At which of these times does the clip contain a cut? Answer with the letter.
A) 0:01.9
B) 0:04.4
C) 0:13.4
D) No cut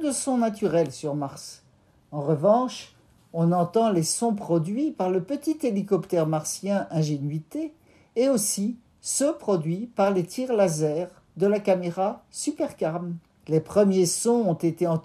C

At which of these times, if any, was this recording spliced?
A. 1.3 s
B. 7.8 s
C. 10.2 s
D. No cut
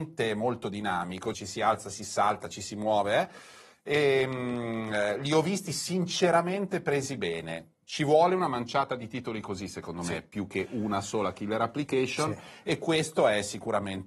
A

